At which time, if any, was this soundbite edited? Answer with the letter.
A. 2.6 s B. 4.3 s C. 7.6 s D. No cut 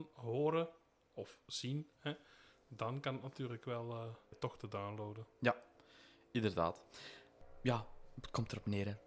B